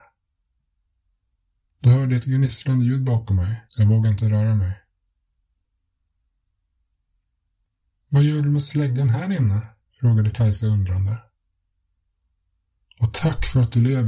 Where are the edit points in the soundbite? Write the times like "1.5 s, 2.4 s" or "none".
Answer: 3.7 s